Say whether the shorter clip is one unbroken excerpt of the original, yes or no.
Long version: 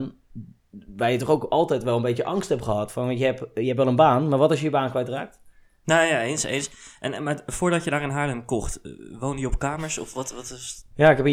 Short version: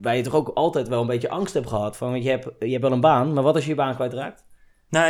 yes